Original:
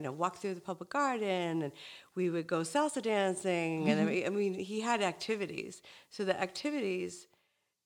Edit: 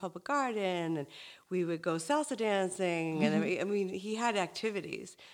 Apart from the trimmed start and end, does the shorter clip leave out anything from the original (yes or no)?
no